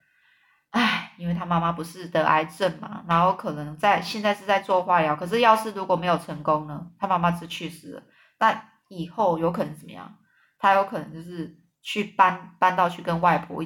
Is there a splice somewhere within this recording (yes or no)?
no